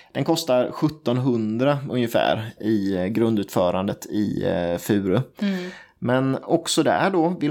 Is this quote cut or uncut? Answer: cut